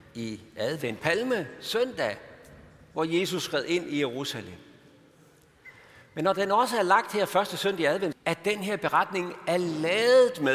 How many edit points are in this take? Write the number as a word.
two